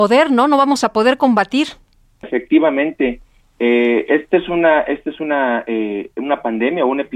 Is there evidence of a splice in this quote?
yes; 1 cut; at 2.2 s

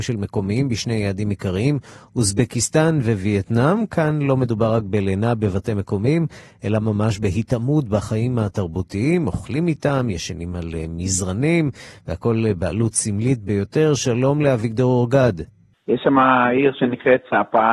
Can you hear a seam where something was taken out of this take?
yes; 1 cut; at 15.7 s

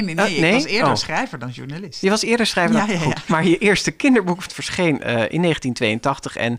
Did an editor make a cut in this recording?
yes; 2 cuts; at 3.3 s, 4.5 s

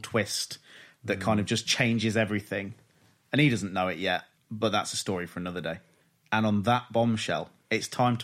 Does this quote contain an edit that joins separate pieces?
yes; 1 cut; at 4.4 s

